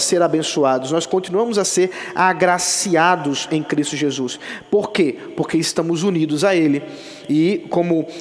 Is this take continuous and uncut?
yes; 0 cuts

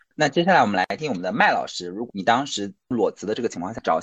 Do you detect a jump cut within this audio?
yes; 1 cut; at 1.0 s

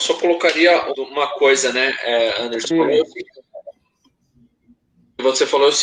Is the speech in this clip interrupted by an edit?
yes; 2 cuts; at 0.9 s, 2.7 s

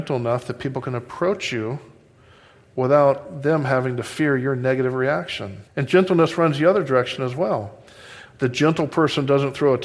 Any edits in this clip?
yes; 2 cuts; at 5.7 s, 8.2 s

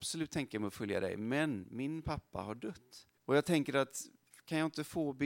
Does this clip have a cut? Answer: yes; 1 cut; at 3.2 s

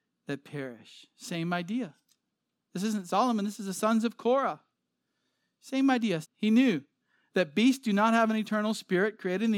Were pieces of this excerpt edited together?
yes; 1 cut; at 6.2 s

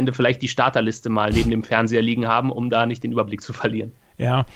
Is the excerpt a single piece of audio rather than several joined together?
yes; 0 cuts

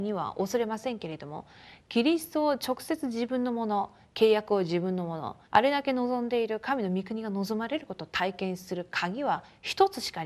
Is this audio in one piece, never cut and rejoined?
no; 1 cut; at 5.4 s

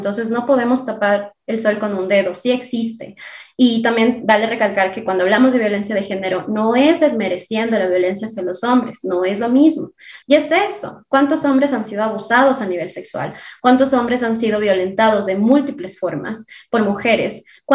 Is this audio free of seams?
no; 1 cut; at 10.2 s

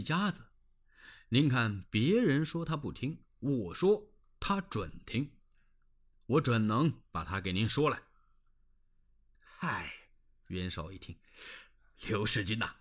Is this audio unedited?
no; 1 cut; at 9.3 s

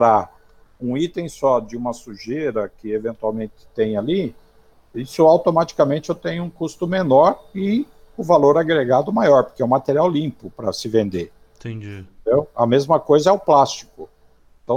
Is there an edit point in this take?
no; 0 cuts

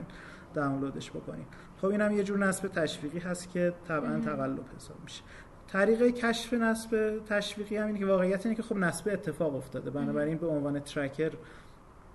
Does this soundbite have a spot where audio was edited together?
no; 0 cuts

